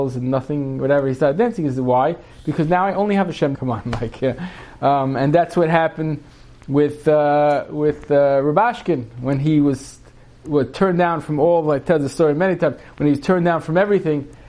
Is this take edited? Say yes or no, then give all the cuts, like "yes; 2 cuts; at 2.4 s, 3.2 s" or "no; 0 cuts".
yes; 1 cut; at 3.5 s